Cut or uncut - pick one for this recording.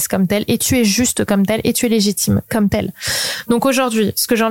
uncut